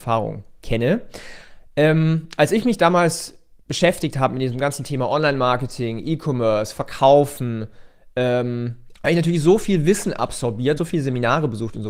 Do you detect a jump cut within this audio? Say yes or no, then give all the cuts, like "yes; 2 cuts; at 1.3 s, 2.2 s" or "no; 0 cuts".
yes; 2 cuts; at 8.9 s, 10.8 s